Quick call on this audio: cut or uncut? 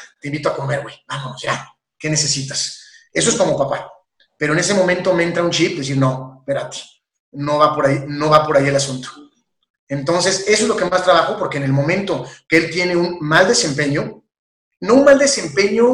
uncut